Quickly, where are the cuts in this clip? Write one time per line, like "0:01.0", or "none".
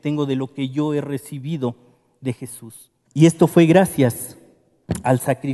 0:03.0